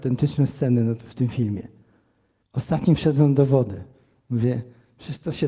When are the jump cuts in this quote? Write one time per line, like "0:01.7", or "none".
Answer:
0:02.4